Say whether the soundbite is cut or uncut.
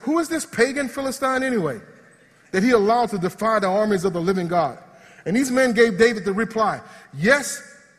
uncut